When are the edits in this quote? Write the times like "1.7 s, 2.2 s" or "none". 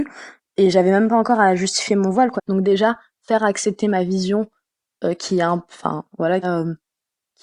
2.4 s, 6.4 s